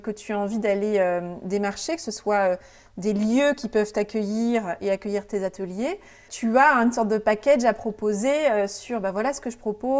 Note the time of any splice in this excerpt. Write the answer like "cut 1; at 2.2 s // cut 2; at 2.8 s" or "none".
cut 1; at 6.3 s